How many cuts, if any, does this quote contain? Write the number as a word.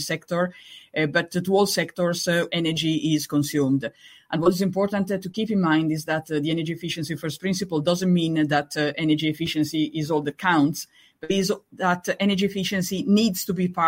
one